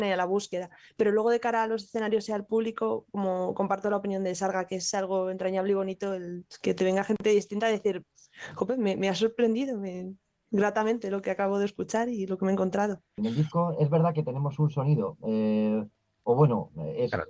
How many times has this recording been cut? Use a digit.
1